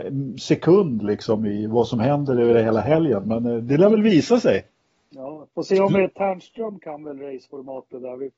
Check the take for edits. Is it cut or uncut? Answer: uncut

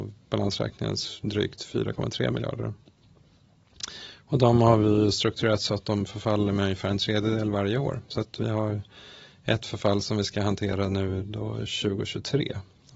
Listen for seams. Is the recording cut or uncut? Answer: uncut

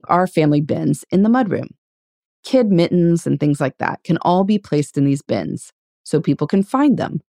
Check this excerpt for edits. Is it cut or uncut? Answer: cut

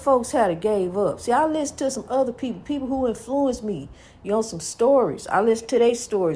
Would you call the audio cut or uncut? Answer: uncut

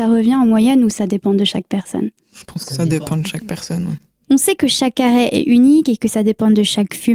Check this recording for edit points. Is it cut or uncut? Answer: uncut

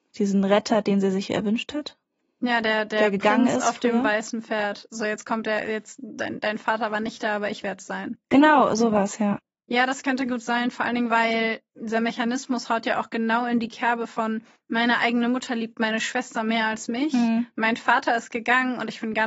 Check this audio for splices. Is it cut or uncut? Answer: uncut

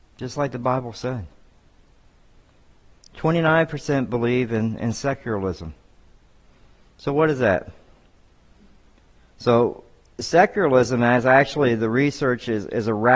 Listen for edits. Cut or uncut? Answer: uncut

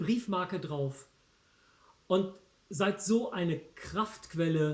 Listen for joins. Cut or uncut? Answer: uncut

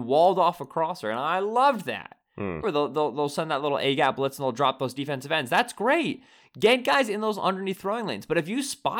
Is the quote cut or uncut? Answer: cut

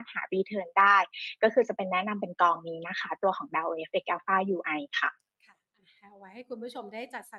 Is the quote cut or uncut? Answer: uncut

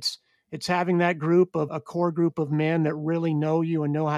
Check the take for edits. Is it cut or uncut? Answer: cut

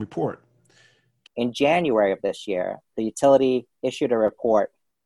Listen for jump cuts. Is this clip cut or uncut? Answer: cut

